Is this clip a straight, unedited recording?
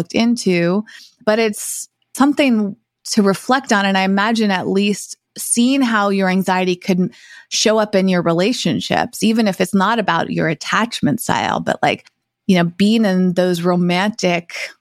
yes; 0 cuts

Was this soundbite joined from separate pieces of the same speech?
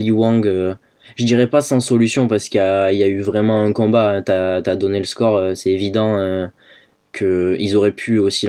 no; 0 cuts

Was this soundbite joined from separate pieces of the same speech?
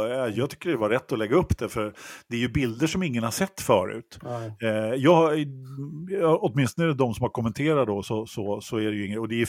no; 0 cuts

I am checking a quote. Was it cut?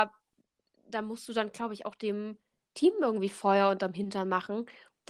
no; 0 cuts

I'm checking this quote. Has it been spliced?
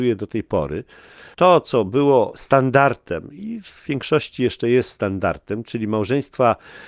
yes; 1 cut; at 1.3 s

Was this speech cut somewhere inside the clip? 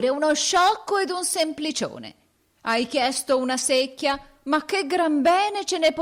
no; 0 cuts

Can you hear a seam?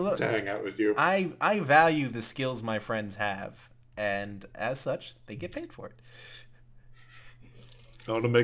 no; 0 cuts

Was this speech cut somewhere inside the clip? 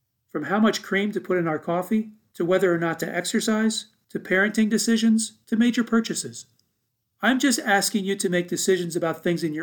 no; 0 cuts

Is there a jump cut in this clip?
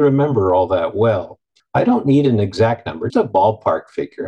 yes; 2 cuts; at 1.6 s, 3.1 s

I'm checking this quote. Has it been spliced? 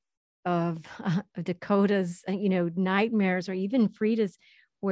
no; 0 cuts

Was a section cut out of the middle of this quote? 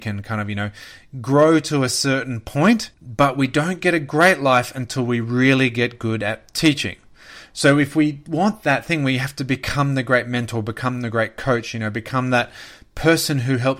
yes; 1 cut; at 2.9 s

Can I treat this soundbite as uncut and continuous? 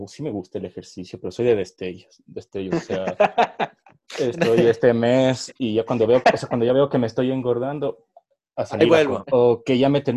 no; 1 cut; at 9.2 s

